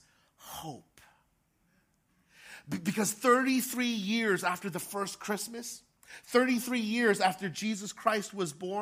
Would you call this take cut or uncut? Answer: uncut